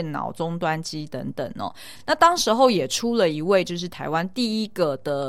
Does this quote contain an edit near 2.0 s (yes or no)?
no